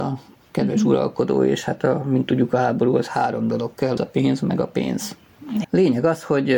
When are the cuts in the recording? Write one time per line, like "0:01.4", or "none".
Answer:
0:04.0
0:05.6